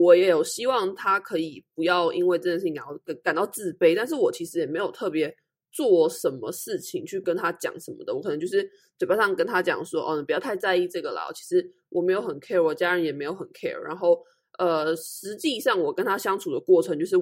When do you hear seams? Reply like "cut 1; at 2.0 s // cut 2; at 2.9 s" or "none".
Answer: none